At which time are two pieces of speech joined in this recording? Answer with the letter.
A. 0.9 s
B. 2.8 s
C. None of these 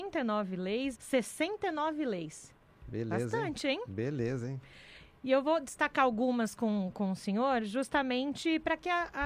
A